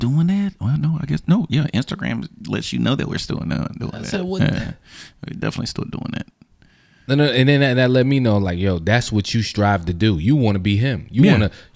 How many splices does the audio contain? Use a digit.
0